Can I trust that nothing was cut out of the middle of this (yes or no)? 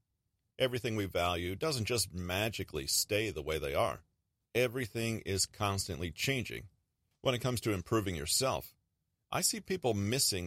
no